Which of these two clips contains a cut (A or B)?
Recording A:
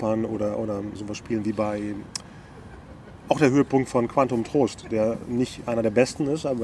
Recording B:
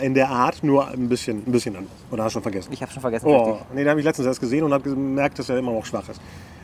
A